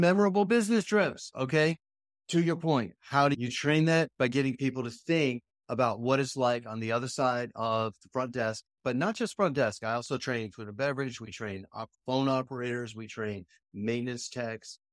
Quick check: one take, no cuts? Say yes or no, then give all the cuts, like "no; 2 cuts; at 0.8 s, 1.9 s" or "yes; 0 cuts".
yes; 0 cuts